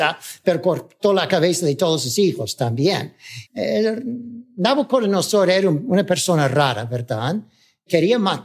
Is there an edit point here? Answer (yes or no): yes